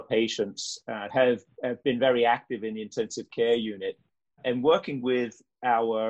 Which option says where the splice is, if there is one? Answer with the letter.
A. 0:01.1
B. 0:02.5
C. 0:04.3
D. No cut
A